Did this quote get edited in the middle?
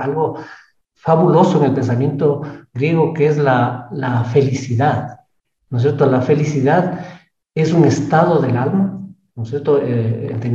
no; 0 cuts

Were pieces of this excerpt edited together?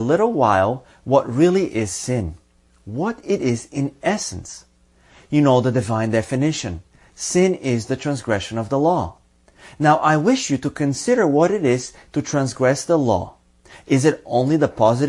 no; 0 cuts

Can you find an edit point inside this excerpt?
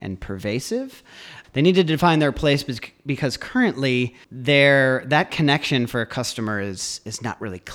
yes; 2 cuts; at 1.4 s, 4.2 s

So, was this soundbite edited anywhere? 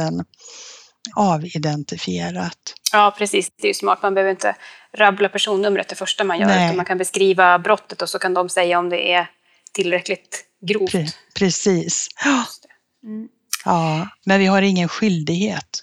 yes; 2 cuts; at 1.1 s, 14.2 s

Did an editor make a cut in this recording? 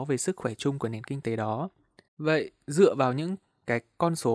yes; 1 cut; at 2.1 s

